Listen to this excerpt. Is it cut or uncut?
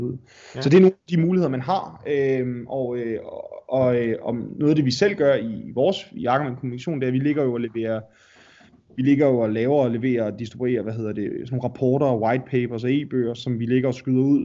uncut